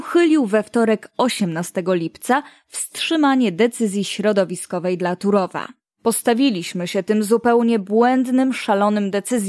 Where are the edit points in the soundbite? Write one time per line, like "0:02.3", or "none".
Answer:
0:05.8